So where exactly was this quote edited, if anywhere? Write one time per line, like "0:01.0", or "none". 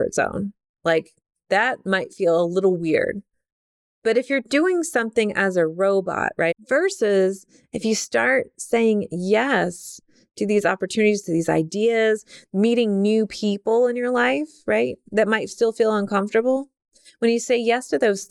0:06.5
0:12.4